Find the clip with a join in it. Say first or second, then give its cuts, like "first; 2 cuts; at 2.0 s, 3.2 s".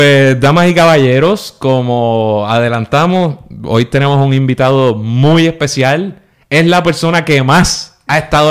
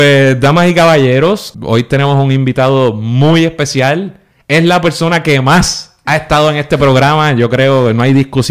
second; 1 cut; at 1.5 s